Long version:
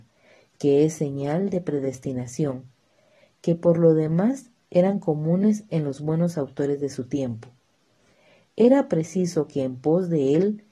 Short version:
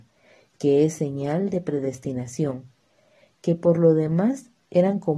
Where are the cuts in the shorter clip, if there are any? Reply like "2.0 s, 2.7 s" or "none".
none